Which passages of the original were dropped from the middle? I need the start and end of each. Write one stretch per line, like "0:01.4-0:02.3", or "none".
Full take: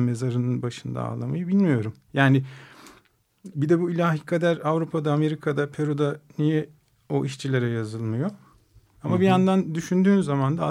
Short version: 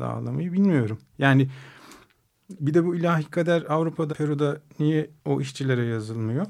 0:05.0-0:05.7
0:06.8-0:07.0